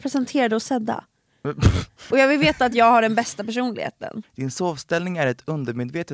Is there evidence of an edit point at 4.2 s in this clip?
yes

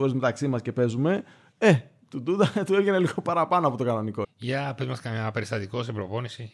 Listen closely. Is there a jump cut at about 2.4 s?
no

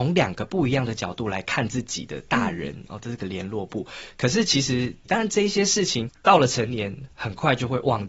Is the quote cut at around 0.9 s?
no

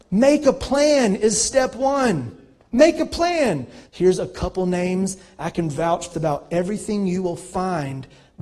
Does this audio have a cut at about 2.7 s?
no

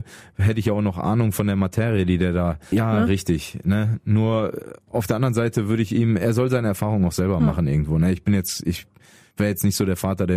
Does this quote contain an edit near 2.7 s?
yes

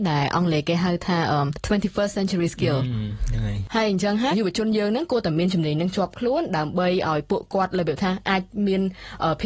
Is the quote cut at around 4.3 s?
yes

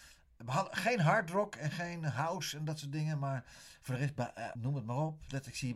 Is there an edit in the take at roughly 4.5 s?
yes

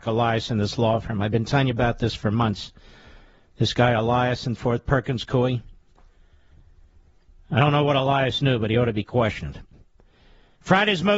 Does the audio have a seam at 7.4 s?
no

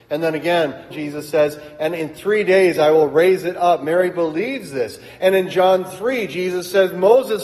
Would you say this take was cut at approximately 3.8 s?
no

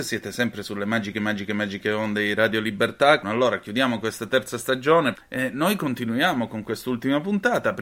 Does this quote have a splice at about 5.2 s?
yes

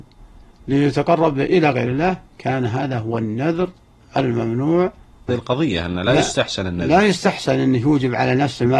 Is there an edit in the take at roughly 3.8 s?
no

